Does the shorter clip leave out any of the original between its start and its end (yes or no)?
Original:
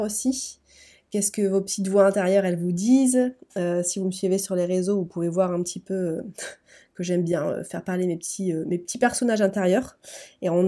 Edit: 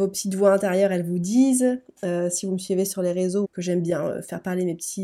yes